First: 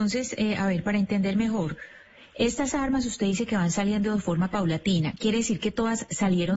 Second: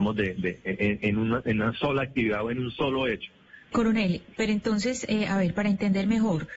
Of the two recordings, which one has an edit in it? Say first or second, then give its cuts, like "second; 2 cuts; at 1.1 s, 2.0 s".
second; 1 cut; at 3.7 s